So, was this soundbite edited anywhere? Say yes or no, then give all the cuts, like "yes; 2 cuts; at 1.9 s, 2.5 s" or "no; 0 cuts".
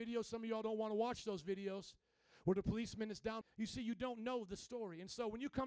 yes; 1 cut; at 3.4 s